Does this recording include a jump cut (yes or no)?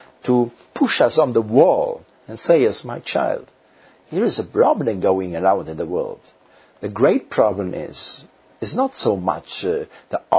no